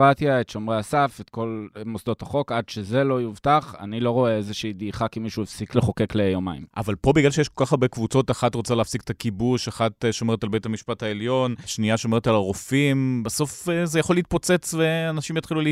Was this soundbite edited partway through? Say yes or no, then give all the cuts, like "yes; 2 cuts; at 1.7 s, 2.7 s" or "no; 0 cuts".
no; 0 cuts